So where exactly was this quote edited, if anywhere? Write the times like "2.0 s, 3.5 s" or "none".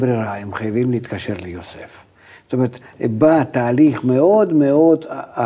none